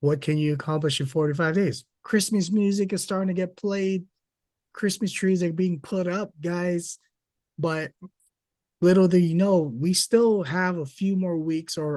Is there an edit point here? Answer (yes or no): yes